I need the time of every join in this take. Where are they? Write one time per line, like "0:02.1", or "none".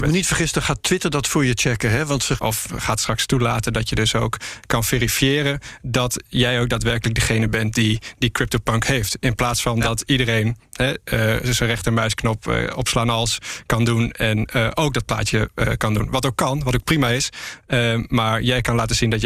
0:02.4